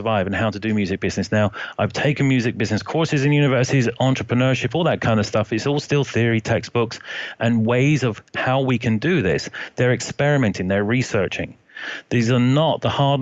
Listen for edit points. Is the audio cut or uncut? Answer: uncut